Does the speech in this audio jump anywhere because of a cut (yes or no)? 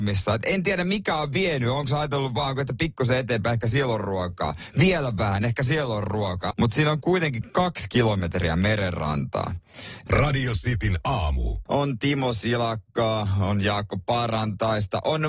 yes